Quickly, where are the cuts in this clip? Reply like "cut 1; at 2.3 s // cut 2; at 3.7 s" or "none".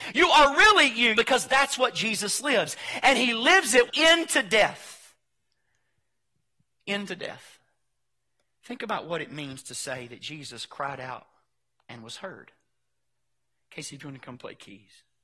cut 1; at 1.1 s // cut 2; at 3.9 s